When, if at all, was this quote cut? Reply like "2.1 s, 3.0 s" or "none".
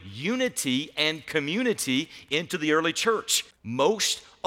3.5 s